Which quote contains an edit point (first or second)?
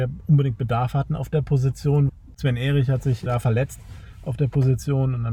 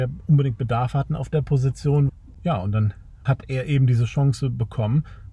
second